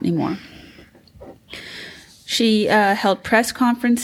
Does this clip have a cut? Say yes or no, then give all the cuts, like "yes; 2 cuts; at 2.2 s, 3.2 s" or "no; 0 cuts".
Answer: no; 0 cuts